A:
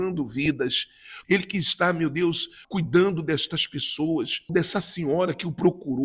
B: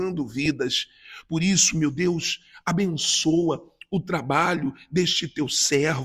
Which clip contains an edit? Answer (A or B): A